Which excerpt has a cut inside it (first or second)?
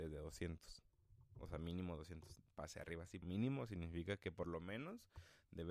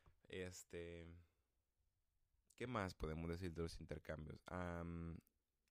first